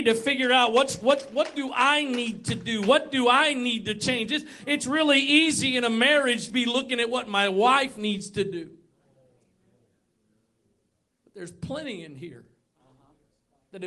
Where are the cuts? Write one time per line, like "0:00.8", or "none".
0:06.5